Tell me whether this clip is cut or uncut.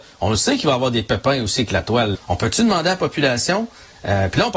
cut